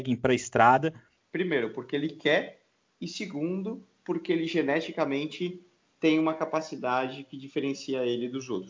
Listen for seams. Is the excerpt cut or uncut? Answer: cut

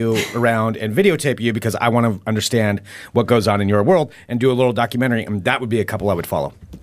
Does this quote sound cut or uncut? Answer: uncut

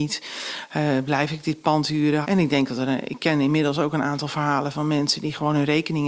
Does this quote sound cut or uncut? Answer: cut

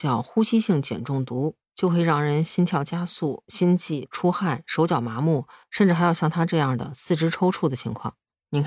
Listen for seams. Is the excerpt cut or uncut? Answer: uncut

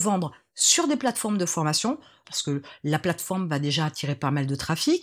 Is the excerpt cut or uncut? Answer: cut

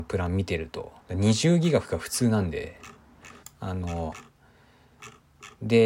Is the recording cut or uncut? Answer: cut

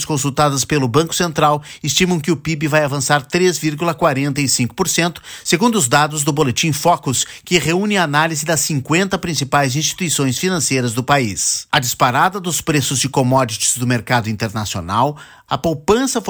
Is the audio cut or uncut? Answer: cut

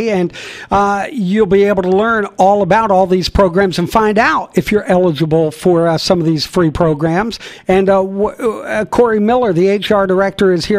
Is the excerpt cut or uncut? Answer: uncut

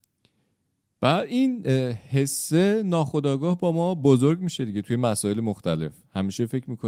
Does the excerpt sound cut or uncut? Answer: uncut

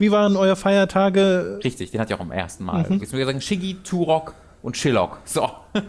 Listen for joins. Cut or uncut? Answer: cut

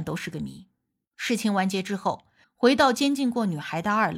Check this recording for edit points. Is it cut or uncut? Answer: cut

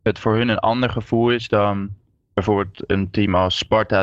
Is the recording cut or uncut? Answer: uncut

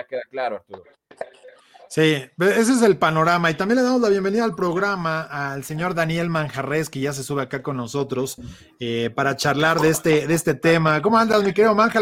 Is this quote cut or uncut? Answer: uncut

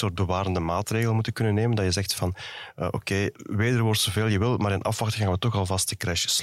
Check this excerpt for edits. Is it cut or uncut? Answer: cut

